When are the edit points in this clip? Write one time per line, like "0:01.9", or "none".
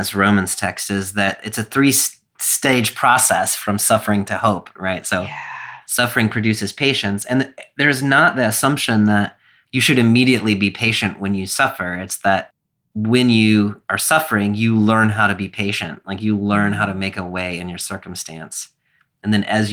none